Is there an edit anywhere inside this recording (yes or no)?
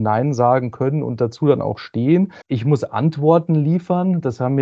yes